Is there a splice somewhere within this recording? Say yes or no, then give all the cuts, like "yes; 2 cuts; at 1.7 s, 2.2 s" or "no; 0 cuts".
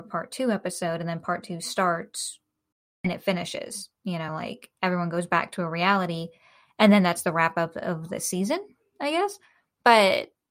no; 0 cuts